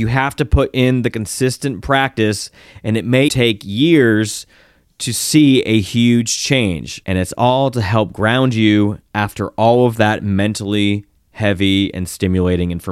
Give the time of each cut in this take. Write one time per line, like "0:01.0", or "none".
0:03.3
0:07.0